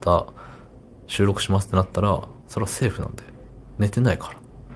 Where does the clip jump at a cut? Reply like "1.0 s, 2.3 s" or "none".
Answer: none